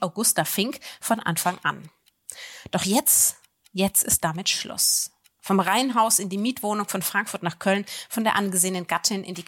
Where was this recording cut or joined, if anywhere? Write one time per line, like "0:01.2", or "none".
none